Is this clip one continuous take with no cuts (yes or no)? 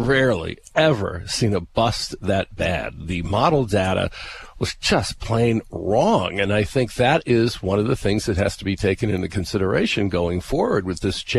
yes